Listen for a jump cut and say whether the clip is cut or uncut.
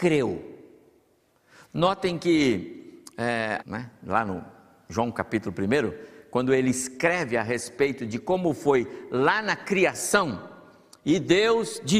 cut